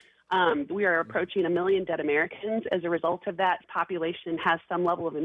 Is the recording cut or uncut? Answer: cut